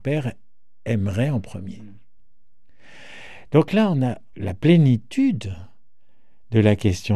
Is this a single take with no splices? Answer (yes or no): no